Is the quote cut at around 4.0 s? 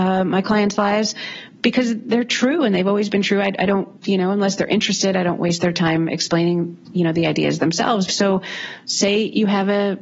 yes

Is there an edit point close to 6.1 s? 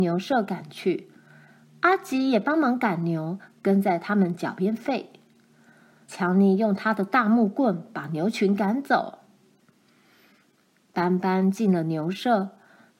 yes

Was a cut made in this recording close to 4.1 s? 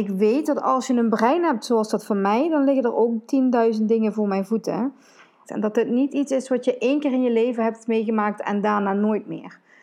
no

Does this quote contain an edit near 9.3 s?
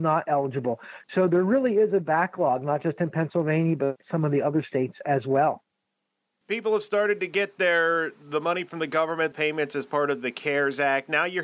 yes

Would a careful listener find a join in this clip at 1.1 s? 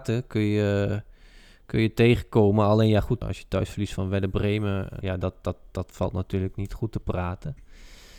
no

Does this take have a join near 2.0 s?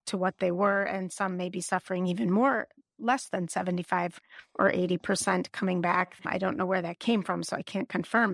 no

